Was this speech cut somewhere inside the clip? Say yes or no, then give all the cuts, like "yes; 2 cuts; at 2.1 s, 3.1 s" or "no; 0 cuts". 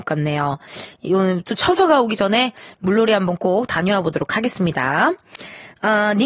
no; 0 cuts